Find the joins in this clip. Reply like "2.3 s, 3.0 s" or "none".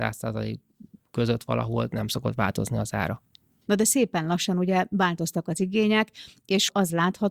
3.6 s